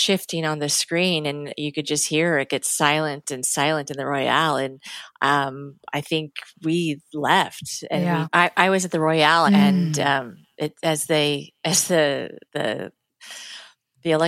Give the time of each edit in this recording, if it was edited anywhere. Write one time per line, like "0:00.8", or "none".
0:08.2
0:09.5
0:12.5